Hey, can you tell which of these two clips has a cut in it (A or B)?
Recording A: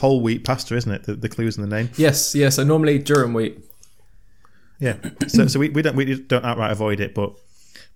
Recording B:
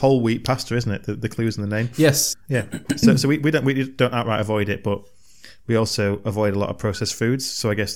B